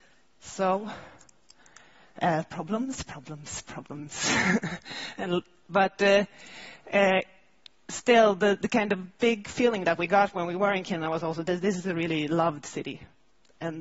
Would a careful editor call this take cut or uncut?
uncut